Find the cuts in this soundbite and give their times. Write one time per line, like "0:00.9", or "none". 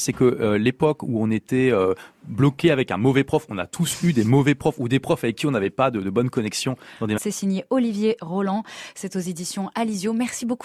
0:07.2